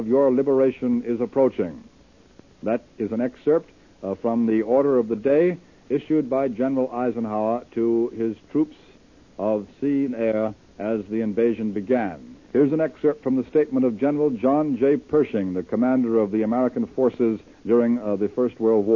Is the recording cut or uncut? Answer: cut